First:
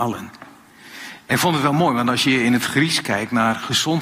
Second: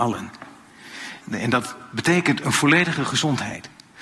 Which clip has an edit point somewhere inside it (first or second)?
second